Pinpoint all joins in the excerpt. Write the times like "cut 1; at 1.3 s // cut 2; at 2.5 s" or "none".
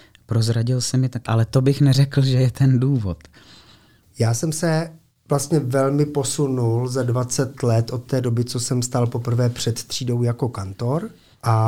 cut 1; at 1.3 s